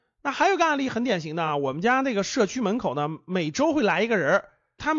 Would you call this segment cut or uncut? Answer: uncut